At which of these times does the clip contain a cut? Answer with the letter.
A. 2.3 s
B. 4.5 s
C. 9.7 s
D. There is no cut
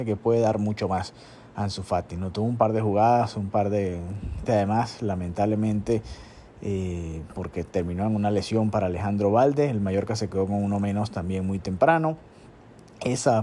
B